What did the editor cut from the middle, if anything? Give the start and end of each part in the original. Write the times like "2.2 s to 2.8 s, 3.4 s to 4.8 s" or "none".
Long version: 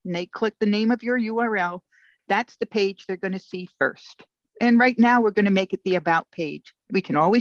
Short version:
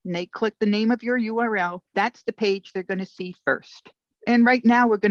1.9 s to 2.2 s

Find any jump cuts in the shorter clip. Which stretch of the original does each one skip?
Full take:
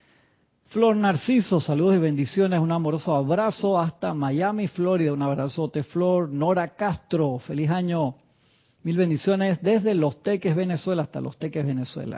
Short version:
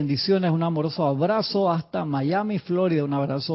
none

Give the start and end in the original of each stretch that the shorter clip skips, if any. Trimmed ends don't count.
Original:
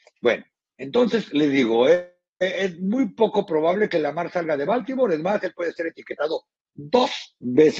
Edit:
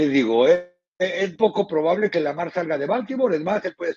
2.8 s to 3.1 s

